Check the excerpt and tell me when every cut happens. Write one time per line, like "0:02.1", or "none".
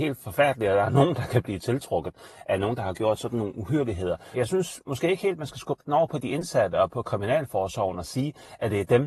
0:04.3